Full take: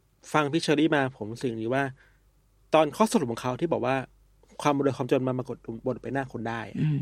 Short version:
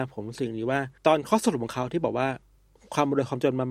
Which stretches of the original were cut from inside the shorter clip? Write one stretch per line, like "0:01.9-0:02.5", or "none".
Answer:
0:02.0-0:02.7